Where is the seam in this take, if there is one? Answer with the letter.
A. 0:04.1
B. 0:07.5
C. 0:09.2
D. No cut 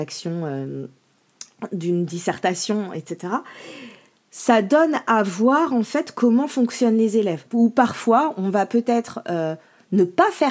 B